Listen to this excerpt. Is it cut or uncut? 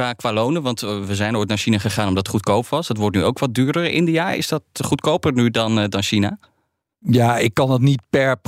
uncut